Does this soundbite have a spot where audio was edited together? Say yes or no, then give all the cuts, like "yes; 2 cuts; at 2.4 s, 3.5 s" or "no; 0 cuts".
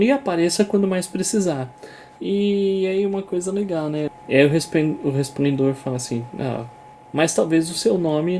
yes; 3 cuts; at 2.2 s, 4.1 s, 6.9 s